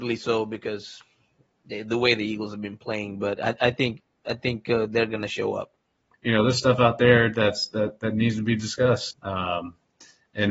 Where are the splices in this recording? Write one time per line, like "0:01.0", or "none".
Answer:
0:06.1
0:09.1